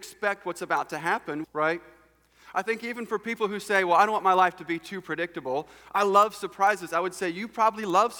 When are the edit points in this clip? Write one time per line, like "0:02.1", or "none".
0:01.4